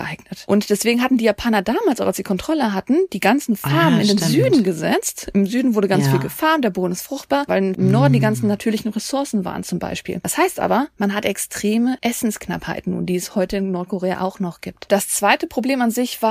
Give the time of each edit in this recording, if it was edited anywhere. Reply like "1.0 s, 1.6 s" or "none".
7.5 s